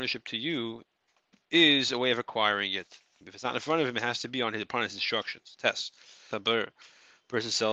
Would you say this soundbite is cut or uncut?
cut